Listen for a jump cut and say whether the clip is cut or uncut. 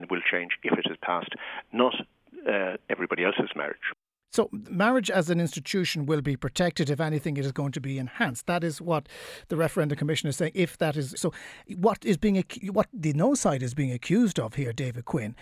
cut